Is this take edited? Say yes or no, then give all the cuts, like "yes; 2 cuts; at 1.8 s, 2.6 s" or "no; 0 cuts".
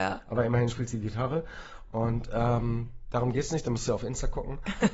no; 0 cuts